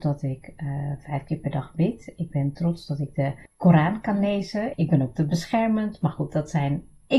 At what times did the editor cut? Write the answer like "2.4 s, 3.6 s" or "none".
3.5 s, 4.7 s